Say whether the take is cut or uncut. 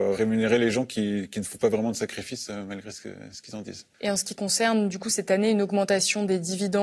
cut